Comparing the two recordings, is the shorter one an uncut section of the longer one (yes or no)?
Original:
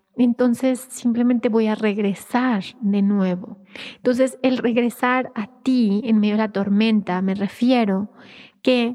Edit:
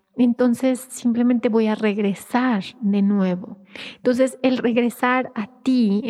yes